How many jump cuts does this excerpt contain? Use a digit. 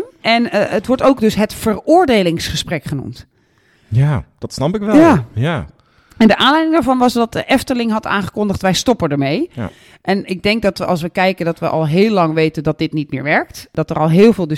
0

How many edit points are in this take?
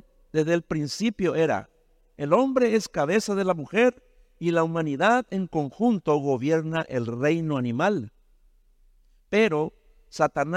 1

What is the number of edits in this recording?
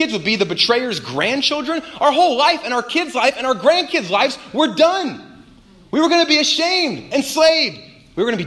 0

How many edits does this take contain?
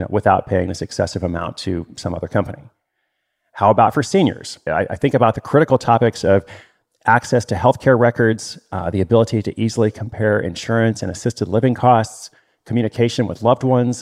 1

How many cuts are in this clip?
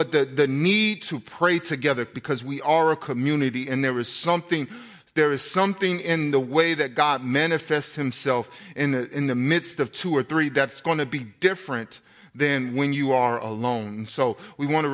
0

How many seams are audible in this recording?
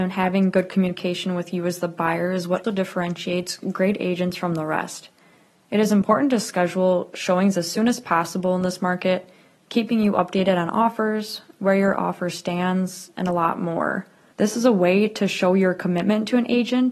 2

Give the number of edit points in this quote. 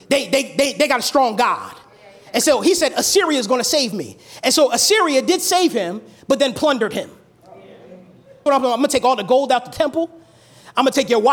1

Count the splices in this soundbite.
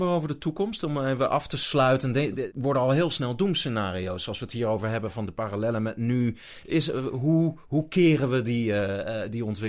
1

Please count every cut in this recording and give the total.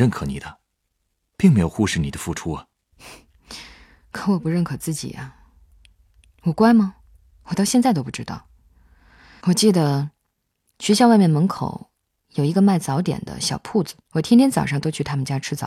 2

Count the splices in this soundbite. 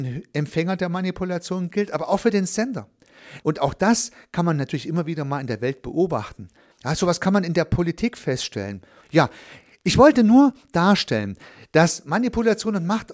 3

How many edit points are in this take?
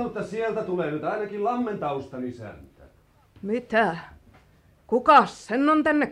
0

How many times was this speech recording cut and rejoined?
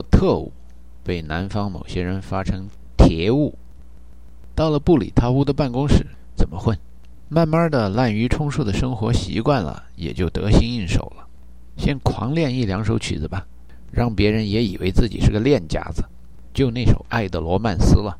2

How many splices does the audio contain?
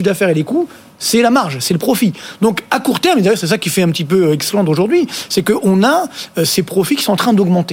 0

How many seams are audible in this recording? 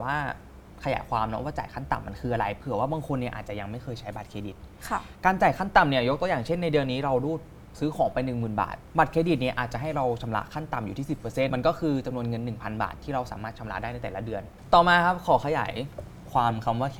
1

